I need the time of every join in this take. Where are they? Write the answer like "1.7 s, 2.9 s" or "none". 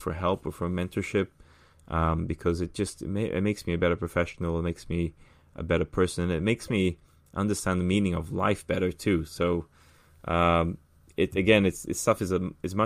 none